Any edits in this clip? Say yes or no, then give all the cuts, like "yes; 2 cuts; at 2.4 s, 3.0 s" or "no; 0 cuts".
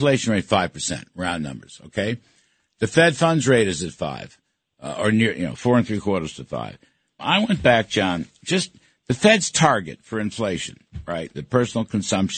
yes; 2 cuts; at 7.2 s, 11.3 s